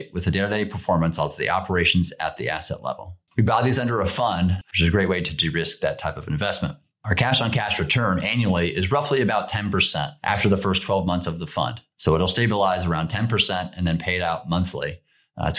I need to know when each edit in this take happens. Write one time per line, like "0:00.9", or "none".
0:03.3
0:04.6